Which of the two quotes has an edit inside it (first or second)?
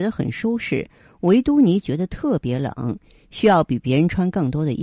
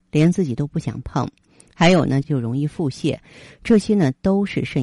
second